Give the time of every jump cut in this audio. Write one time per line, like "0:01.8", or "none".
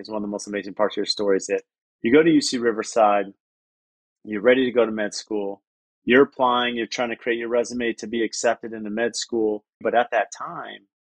0:05.8
0:09.8